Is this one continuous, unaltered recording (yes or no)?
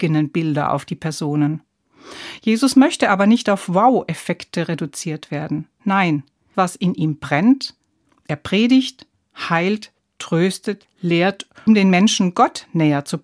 no